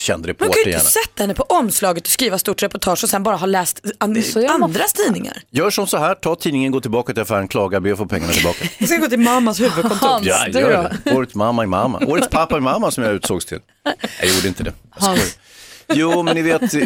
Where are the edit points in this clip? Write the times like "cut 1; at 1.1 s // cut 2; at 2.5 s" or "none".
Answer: none

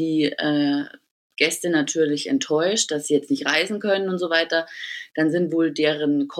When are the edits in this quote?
none

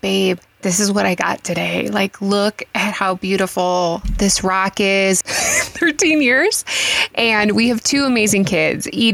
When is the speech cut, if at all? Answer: cut 1; at 5.2 s

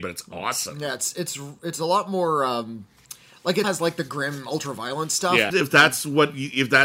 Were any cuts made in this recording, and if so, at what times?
cut 1; at 3.6 s // cut 2; at 5.5 s

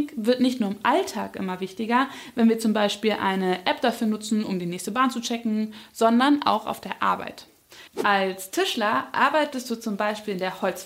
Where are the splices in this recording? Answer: cut 1; at 7.9 s

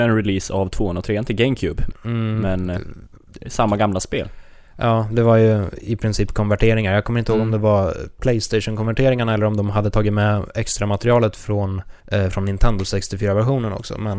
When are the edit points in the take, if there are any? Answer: cut 1; at 1.9 s // cut 2; at 5.8 s // cut 3; at 12.0 s

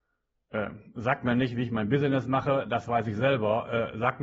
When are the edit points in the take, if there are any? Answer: none

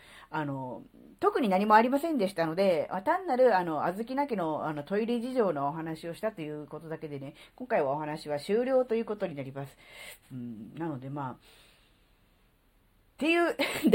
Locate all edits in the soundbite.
cut 1; at 10.2 s

